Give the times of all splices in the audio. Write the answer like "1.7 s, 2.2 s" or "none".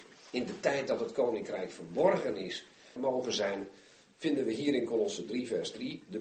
3.0 s